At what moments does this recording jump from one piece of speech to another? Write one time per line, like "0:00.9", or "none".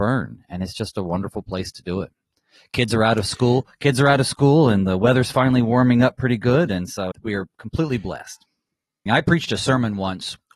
0:07.1
0:09.1